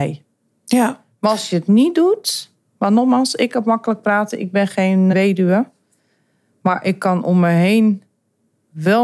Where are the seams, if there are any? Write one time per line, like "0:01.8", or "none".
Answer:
0:05.1